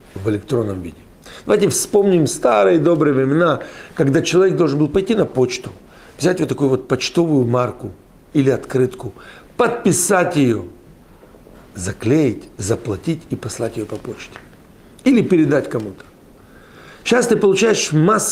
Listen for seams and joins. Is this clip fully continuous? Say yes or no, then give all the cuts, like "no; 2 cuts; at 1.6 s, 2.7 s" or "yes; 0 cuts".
yes; 0 cuts